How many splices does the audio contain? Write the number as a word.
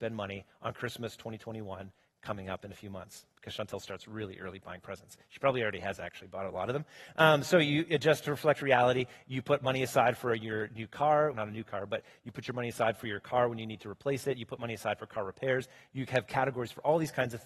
one